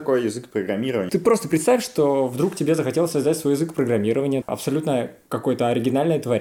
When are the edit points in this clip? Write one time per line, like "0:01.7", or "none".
0:01.1
0:04.4